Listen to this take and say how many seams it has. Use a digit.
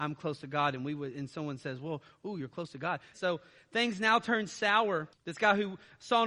2